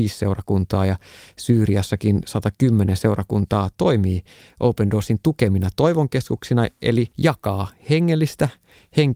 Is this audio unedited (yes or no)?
no